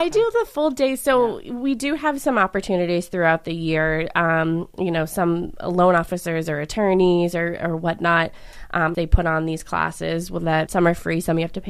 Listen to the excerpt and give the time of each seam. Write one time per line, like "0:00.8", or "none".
0:08.9
0:10.7